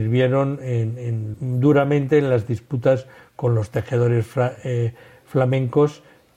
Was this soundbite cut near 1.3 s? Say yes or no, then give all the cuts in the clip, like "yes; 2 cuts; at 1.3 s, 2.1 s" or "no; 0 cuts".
yes; 1 cut; at 1.3 s